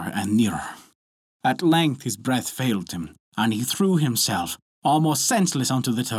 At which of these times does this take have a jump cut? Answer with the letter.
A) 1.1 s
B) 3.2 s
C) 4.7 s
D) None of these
D